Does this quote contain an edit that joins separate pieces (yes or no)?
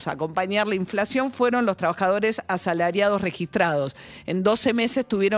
no